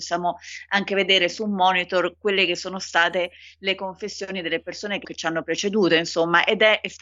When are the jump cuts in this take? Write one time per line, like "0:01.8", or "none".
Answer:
0:05.0